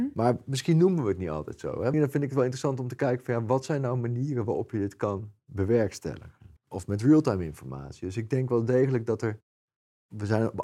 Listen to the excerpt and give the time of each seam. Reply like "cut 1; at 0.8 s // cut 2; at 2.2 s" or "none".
cut 1; at 1.9 s // cut 2; at 6.6 s